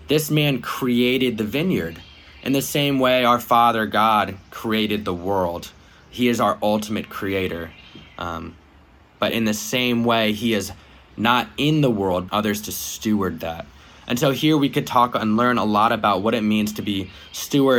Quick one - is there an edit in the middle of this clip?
yes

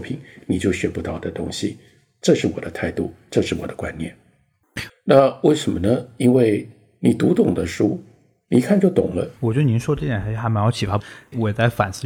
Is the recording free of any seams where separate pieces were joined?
no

